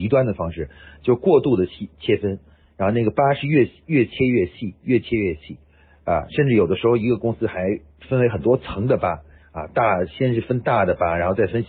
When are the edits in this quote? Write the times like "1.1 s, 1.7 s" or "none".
none